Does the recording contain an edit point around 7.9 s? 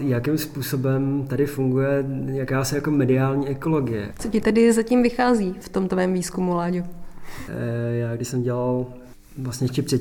no; 1 cut; at 4.1 s

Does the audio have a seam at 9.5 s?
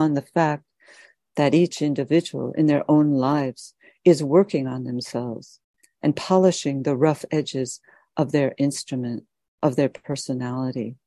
no; 1 cut; at 5.8 s

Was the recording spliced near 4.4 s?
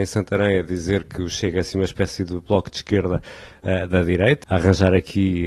yes; 1 cut; at 4.4 s

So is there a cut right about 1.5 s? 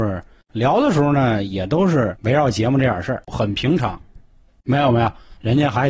no; 1 cut; at 4.6 s

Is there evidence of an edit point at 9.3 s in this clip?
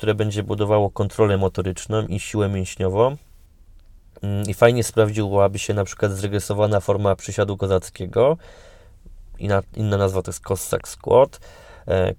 no; 0 cuts

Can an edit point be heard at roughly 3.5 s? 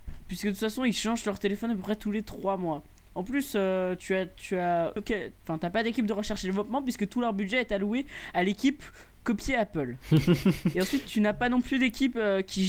no; 1 cut; at 5.0 s

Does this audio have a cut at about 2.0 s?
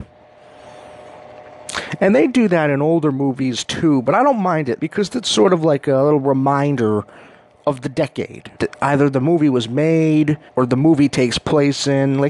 no; 3 cuts; at 4.8 s, 8.6 s, 10.5 s

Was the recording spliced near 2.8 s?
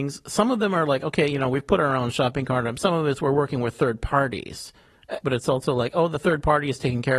no; 1 cut; at 5.2 s

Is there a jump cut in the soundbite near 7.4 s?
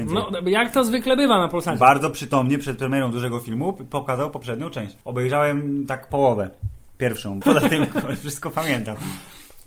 yes; 2 cuts; at 5.0 s, 7.4 s

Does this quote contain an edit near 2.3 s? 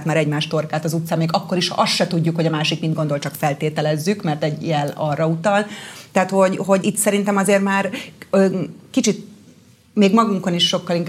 no; 1 cut; at 6.8 s

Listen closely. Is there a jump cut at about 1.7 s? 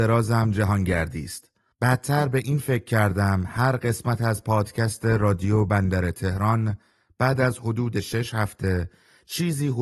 yes; 1 cut; at 1.7 s

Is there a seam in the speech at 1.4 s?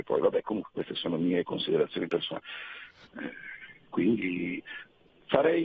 no; 1 cut; at 3.0 s

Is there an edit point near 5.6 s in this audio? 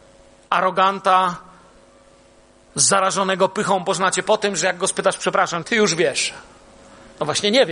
yes; 1 cut; at 5.6 s

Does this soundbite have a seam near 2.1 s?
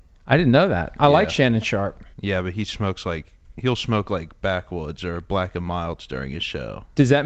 yes; 1 cut; at 2.1 s

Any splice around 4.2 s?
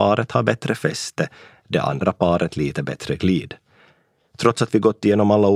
yes; 1 cut; at 4.2 s

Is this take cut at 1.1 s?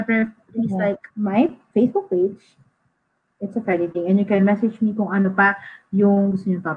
yes; 1 cut; at 1.1 s

